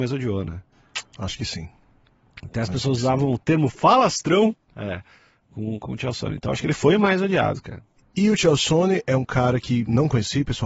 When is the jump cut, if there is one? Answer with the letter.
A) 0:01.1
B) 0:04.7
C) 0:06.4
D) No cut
B